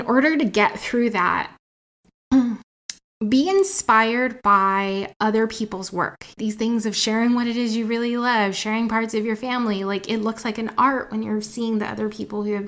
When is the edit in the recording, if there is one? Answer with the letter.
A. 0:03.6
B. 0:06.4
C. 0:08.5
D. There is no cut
B